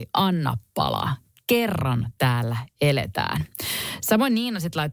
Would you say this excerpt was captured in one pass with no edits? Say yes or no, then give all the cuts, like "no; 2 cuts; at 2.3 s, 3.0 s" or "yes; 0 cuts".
yes; 0 cuts